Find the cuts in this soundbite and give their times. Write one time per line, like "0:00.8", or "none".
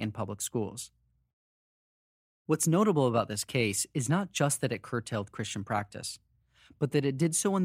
none